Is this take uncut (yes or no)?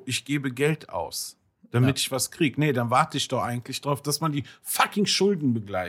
yes